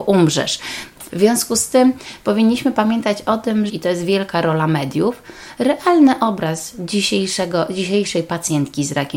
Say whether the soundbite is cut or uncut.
cut